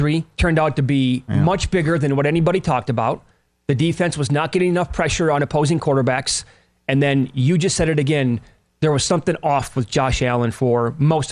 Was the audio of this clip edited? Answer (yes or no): no